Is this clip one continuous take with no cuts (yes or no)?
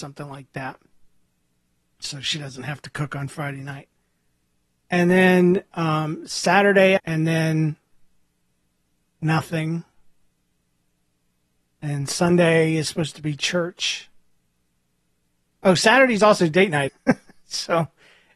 no